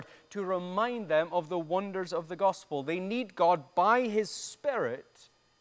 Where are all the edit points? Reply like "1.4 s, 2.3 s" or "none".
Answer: none